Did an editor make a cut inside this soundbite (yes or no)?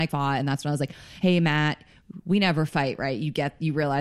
no